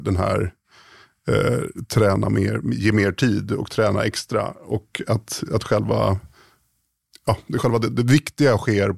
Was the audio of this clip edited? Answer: no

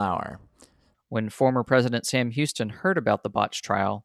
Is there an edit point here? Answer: yes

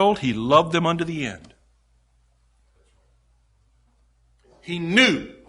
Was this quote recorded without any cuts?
yes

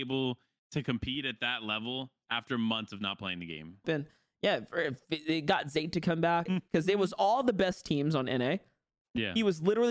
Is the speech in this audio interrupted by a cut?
yes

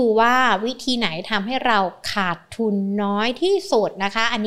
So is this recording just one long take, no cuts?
yes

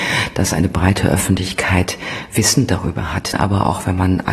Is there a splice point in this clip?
yes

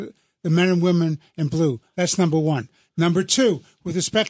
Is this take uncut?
yes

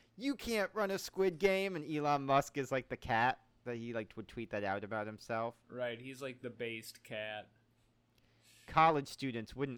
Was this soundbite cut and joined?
no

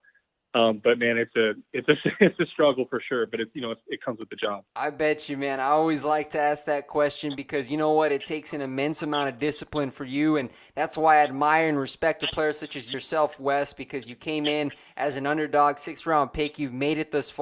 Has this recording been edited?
yes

